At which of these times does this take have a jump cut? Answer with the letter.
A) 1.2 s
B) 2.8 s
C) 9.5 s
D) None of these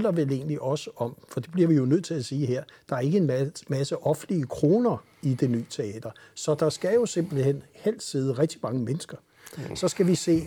C